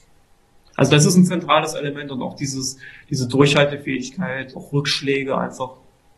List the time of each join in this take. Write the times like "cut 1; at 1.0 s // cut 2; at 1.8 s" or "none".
cut 1; at 4.5 s